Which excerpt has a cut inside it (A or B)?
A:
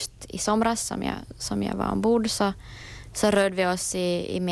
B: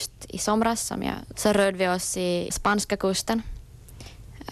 B